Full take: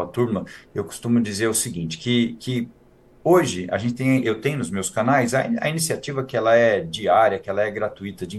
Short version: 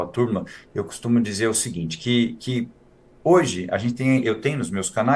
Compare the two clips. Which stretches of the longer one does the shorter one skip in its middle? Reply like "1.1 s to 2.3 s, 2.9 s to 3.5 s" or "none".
none